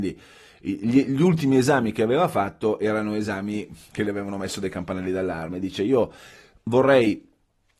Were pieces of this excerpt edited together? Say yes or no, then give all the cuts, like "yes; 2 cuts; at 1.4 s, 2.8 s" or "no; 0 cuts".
no; 0 cuts